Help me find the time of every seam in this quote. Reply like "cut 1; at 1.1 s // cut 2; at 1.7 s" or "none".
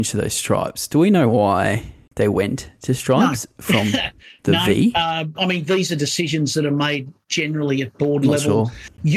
none